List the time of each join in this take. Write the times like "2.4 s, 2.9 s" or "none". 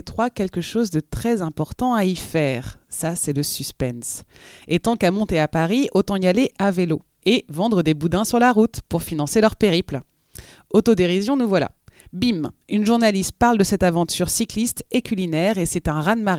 none